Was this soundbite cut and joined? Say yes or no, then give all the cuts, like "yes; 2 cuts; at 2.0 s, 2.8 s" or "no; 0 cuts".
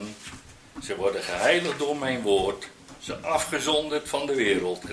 no; 0 cuts